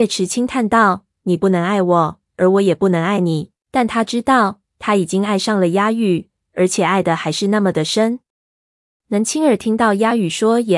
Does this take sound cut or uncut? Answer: cut